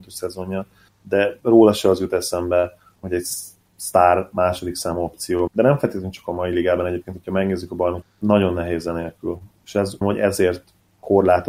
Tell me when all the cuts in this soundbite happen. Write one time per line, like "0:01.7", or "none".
0:05.5
0:08.0
0:10.0